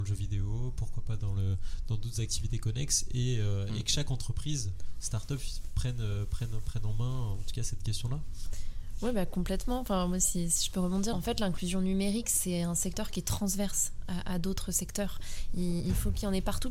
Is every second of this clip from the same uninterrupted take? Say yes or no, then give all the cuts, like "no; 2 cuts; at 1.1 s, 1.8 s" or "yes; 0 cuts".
no; 1 cut; at 11.1 s